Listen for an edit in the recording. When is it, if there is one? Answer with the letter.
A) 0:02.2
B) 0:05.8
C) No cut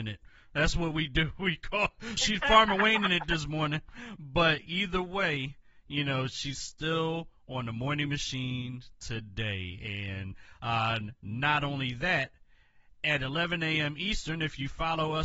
A